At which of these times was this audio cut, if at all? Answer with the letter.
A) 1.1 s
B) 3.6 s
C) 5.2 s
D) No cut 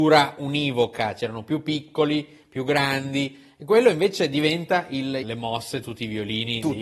C